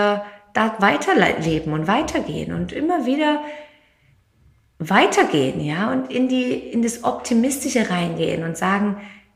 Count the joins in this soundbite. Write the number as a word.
zero